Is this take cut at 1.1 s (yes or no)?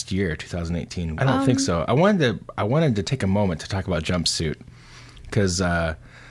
yes